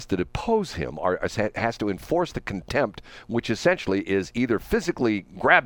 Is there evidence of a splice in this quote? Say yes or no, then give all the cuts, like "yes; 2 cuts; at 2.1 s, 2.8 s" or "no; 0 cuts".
no; 0 cuts